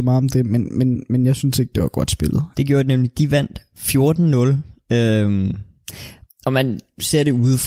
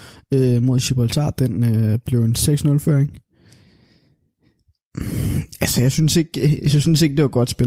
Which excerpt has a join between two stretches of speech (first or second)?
first